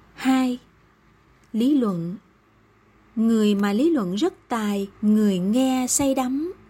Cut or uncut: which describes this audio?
cut